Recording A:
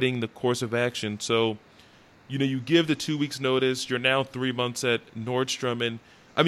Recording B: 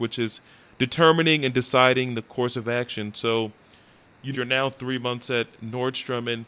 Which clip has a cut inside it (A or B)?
B